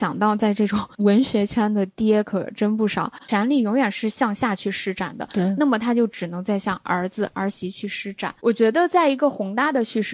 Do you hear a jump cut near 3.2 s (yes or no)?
yes